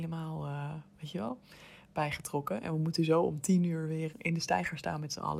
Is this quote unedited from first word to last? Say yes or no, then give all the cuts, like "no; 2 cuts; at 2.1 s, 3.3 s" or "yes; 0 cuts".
no; 1 cut; at 4.1 s